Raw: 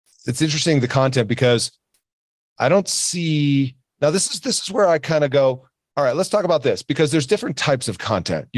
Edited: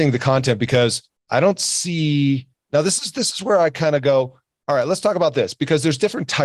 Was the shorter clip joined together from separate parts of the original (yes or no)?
yes